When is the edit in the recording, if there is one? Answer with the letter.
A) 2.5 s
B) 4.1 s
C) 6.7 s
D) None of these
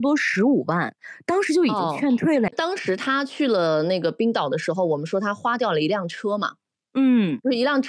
A